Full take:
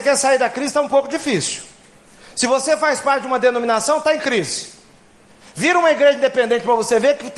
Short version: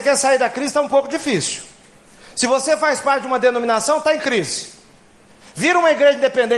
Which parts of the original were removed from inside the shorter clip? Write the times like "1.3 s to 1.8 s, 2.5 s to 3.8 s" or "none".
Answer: none